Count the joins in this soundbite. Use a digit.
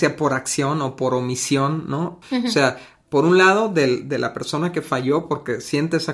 1